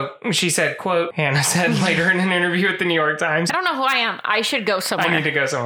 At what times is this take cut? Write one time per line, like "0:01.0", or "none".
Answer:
0:01.1
0:03.5